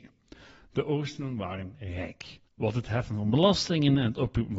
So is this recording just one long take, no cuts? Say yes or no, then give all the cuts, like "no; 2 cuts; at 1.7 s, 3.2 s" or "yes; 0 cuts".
no; 1 cut; at 2.5 s